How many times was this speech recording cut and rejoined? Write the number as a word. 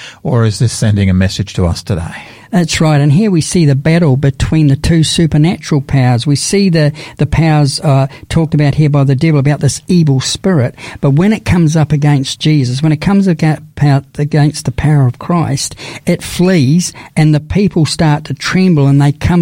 zero